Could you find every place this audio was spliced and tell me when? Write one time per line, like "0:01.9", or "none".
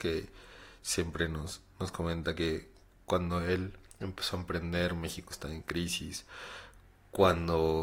none